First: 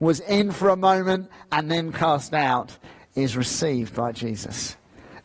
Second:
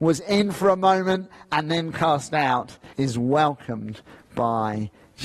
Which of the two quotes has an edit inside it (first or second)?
second